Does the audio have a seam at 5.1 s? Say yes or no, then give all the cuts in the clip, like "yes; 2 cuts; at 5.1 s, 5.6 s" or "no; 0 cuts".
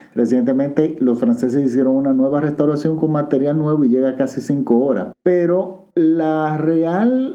yes; 1 cut; at 5.1 s